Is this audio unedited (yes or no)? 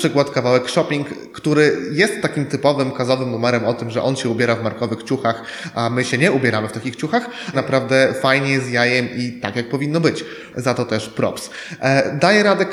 no